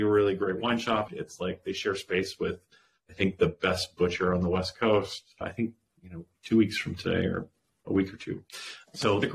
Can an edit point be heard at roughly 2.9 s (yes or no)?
no